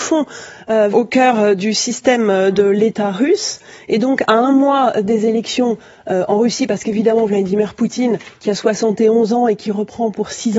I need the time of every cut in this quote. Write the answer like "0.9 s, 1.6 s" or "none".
0.9 s